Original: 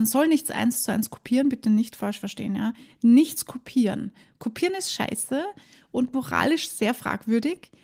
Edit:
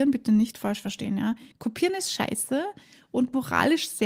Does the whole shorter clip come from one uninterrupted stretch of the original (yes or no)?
no